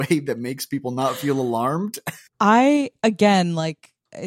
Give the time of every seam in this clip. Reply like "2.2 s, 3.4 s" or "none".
2.3 s